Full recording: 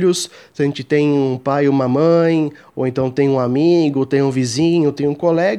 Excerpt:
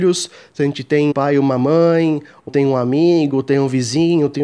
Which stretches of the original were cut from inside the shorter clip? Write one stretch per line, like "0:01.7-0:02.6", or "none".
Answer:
0:01.1-0:01.4
0:02.8-0:03.1